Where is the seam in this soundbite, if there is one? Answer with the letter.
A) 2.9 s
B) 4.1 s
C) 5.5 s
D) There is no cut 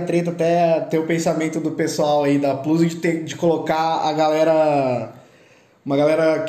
D